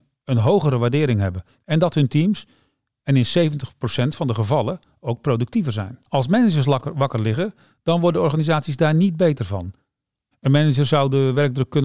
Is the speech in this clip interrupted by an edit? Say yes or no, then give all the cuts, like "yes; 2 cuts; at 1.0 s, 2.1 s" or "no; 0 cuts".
yes; 2 cuts; at 6.1 s, 10.3 s